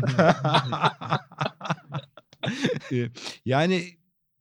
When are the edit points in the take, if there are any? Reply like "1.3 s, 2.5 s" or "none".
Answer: 2.9 s

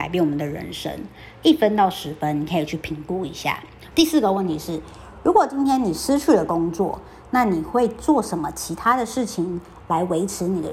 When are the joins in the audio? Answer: 3.9 s

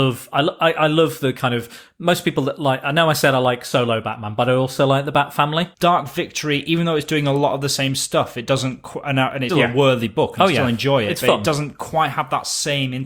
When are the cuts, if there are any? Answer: 5.7 s, 9.5 s

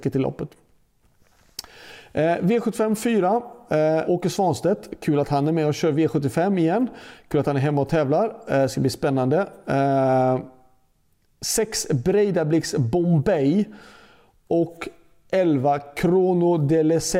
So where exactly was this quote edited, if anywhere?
4.1 s

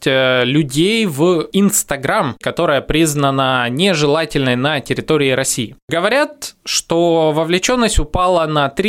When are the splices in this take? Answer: 2.4 s

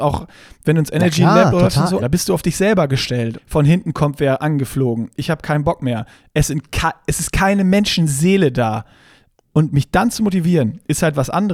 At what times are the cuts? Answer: 2.0 s, 3.3 s

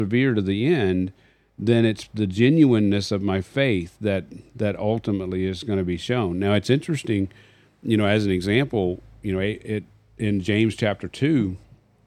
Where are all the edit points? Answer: none

